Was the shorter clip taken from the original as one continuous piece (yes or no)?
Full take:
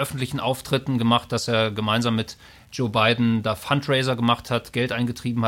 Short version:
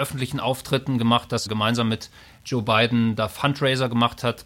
no